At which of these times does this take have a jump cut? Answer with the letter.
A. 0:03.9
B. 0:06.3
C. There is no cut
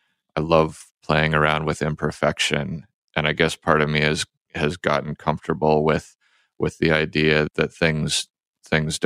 C